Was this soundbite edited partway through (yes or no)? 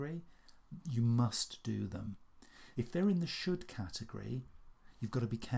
yes